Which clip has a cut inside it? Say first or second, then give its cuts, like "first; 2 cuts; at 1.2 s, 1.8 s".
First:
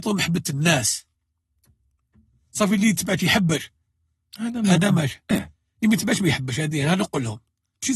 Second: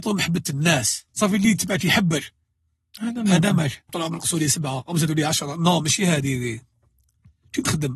second; 2 cuts; at 1.1 s, 3.9 s